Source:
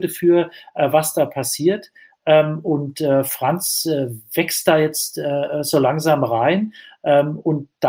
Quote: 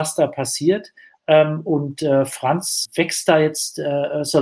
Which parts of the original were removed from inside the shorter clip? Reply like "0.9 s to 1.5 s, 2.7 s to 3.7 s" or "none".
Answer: 3.8 s to 4.2 s

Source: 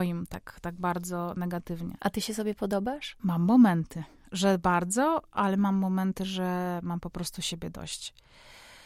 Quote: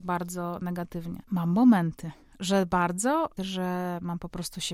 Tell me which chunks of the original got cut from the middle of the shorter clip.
2.0 s to 3.1 s, 5.3 s to 6.2 s

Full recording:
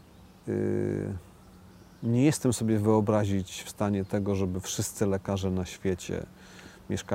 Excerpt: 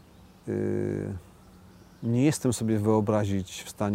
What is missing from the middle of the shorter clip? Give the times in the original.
none

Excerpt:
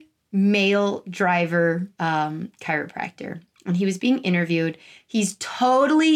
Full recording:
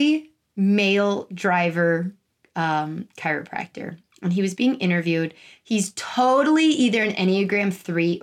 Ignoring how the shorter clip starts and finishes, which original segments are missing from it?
2.2 s to 2.5 s

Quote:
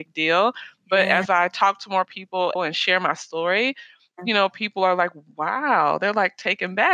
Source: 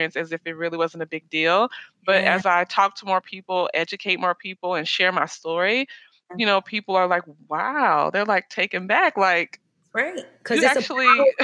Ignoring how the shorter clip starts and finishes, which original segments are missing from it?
3.7 s to 4.7 s

